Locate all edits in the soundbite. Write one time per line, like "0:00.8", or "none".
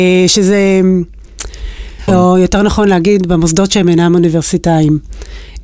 0:02.1